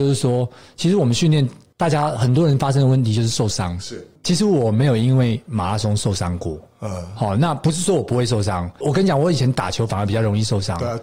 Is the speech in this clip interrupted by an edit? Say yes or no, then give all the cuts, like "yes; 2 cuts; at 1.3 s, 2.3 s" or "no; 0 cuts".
yes; 1 cut; at 8.8 s